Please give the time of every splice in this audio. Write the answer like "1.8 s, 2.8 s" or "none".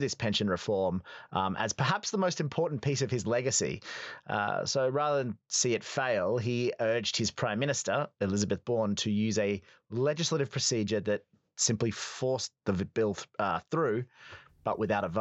none